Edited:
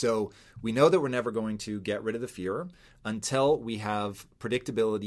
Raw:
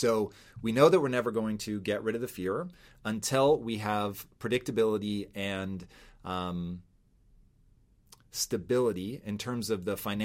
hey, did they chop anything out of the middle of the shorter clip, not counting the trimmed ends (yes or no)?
no